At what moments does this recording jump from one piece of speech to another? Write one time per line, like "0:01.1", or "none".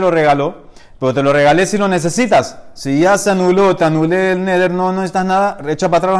none